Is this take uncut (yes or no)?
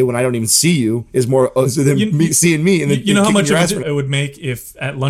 no